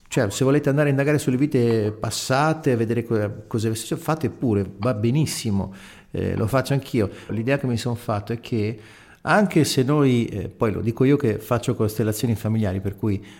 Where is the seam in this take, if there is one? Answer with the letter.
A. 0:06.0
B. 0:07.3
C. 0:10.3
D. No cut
B